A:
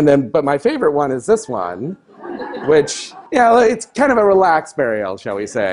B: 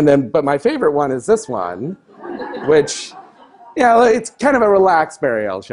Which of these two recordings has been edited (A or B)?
A